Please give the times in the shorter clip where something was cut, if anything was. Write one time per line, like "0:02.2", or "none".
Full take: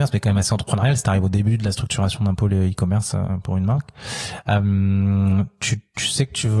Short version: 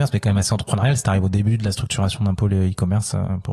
none